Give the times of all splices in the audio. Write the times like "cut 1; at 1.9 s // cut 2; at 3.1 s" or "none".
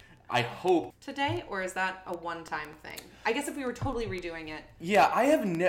cut 1; at 0.9 s